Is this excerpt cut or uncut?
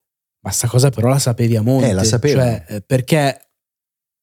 uncut